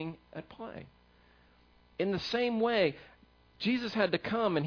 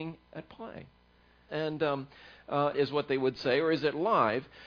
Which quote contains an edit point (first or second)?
second